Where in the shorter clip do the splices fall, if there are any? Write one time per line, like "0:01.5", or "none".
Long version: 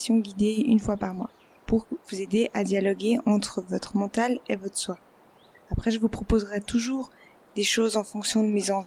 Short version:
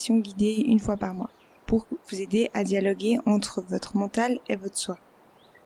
none